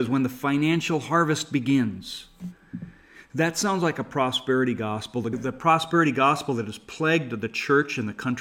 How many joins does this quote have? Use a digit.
1